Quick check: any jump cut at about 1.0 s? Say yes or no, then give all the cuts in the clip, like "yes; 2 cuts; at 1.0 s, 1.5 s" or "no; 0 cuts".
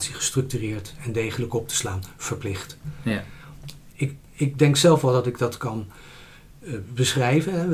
no; 1 cut; at 3.9 s